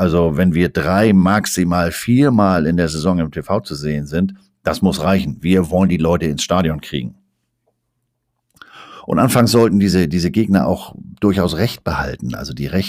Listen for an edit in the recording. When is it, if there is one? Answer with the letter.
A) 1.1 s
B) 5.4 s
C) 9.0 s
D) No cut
D